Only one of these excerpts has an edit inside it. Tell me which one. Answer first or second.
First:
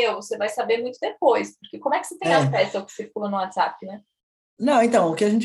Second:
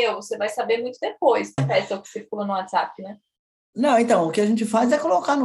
second